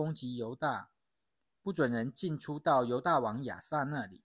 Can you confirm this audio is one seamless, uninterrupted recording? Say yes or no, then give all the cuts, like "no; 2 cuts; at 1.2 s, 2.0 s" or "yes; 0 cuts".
no; 1 cut; at 1.5 s